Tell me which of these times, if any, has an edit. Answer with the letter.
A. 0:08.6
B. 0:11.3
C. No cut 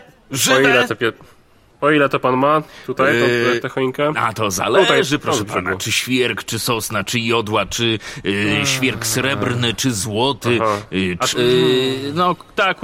B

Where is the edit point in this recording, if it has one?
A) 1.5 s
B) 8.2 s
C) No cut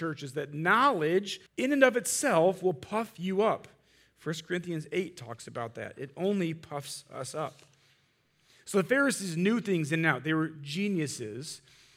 A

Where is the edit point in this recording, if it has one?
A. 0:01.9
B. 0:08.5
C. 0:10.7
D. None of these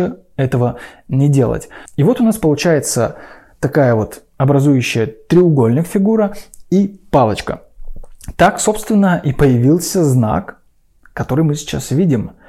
A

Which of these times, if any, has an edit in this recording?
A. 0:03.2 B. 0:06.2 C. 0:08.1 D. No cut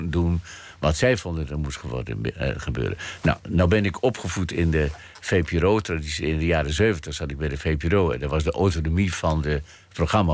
D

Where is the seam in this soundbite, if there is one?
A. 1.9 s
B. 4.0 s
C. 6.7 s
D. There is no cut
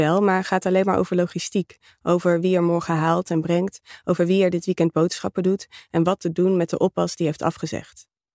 D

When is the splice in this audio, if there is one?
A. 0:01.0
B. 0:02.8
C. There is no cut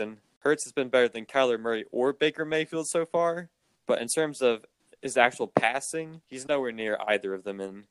C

